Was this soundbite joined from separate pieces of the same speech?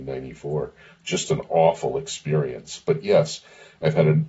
no; 0 cuts

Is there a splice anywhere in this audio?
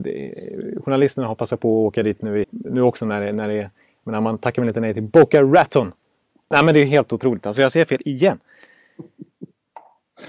yes; 2 cuts; at 2.4 s, 6.5 s

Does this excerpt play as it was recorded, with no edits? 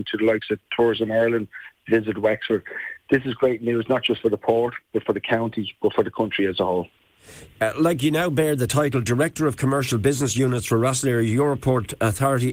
yes; 0 cuts

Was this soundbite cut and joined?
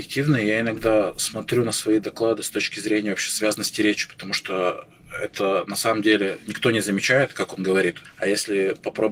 no; 0 cuts

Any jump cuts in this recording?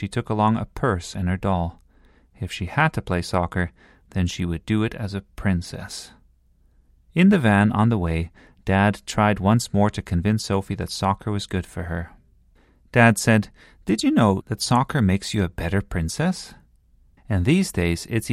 yes; 2 cuts; at 14.4 s, 17.2 s

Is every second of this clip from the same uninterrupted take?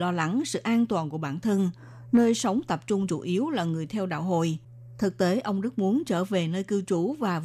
no; 1 cut; at 2.1 s

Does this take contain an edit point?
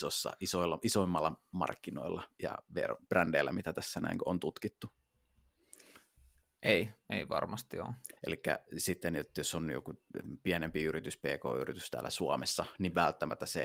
yes; 1 cut; at 8.2 s

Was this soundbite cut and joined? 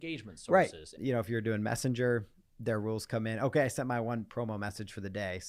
yes; 1 cut; at 1.0 s

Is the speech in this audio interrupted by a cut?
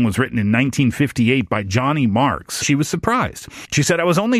yes; 1 cut; at 2.6 s

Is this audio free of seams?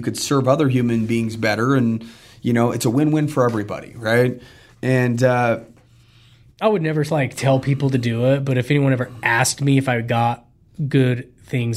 yes; 0 cuts

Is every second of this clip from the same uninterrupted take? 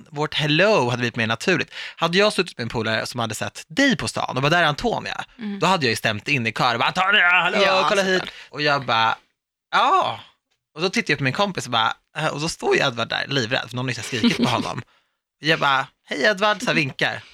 no; 1 cut; at 8.5 s

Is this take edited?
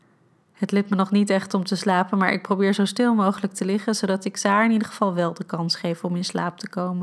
no; 0 cuts

